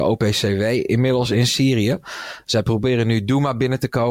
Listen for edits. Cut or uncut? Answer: uncut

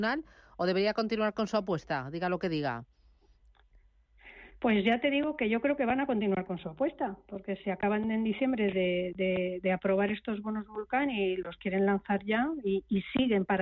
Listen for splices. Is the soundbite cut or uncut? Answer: uncut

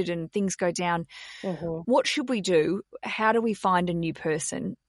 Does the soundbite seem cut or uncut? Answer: uncut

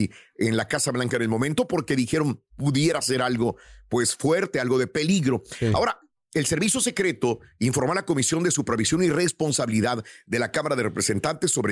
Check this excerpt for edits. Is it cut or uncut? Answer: uncut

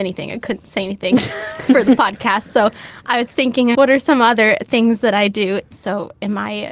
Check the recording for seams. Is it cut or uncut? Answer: cut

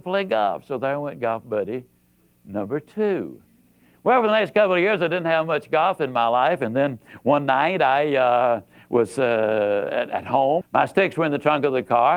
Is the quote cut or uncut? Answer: cut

